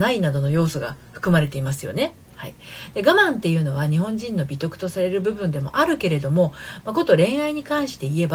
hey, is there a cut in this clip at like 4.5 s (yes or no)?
no